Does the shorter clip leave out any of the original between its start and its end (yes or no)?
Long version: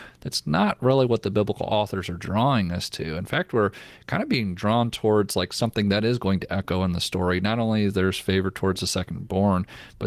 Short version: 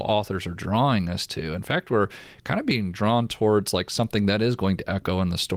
no